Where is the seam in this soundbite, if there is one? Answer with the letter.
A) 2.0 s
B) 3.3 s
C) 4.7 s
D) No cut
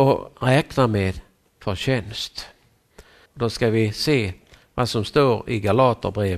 B